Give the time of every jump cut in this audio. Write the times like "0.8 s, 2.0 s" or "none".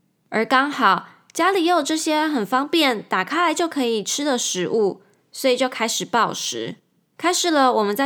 none